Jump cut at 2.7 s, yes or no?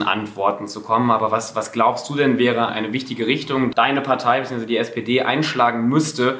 yes